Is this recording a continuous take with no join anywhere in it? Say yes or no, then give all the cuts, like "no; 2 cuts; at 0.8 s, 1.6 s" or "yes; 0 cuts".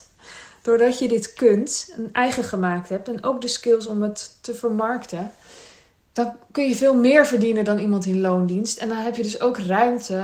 yes; 0 cuts